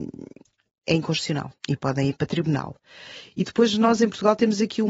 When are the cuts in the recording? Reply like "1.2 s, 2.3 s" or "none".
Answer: 1.6 s